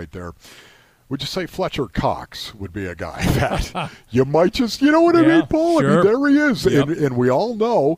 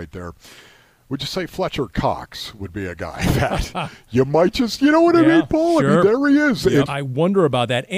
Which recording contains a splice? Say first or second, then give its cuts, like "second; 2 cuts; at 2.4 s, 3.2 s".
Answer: second; 1 cut; at 6.9 s